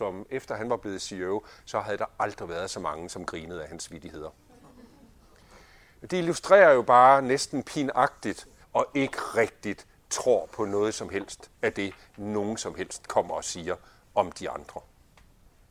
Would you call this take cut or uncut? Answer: cut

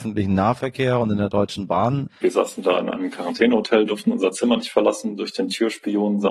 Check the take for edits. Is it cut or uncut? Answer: cut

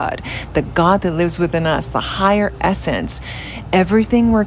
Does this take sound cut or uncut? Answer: uncut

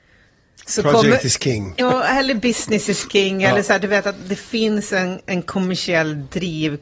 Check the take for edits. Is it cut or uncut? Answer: cut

